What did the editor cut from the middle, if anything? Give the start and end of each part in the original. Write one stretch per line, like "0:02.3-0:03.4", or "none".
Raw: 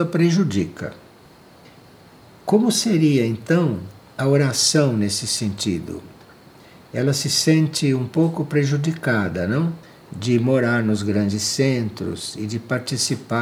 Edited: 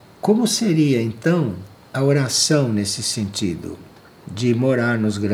0:06.4-0:10.0